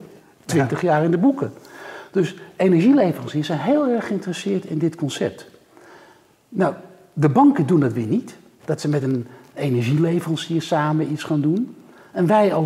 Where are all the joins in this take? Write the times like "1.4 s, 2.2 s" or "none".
8.6 s